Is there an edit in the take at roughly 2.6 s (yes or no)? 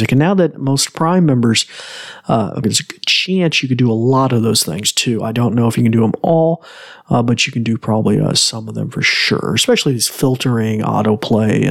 yes